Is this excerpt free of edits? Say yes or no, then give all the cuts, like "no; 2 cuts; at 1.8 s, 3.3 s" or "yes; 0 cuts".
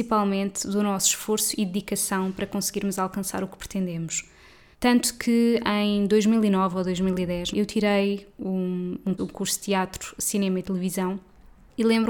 no; 3 cuts; at 4.7 s, 7.5 s, 9.2 s